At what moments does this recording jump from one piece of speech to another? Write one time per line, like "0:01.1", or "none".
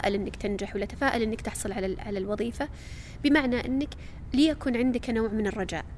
none